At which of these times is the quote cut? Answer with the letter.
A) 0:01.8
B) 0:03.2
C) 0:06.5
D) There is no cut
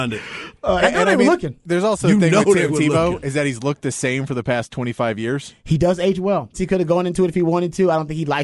C